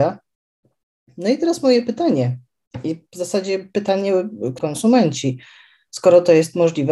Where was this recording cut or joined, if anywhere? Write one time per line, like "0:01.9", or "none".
0:04.6